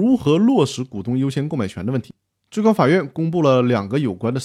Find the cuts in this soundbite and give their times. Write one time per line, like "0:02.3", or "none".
none